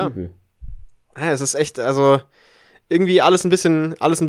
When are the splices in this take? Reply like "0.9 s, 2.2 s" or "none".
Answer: none